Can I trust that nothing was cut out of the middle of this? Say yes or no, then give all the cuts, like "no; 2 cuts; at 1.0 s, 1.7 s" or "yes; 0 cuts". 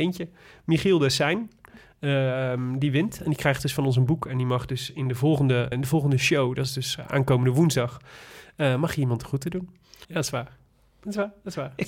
no; 2 cuts; at 5.7 s, 10.0 s